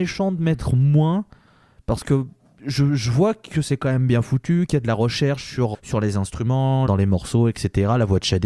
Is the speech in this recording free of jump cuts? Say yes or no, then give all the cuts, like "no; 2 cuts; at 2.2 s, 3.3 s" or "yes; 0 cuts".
no; 2 cuts; at 5.7 s, 6.9 s